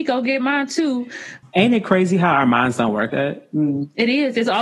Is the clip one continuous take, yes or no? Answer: no